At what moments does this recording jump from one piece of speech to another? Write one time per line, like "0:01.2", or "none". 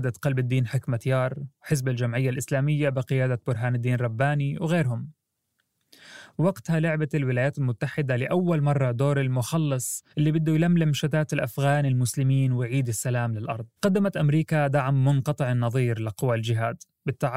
0:10.1
0:13.8